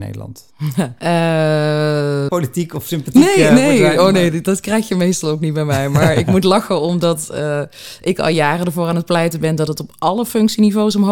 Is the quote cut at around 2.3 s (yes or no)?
yes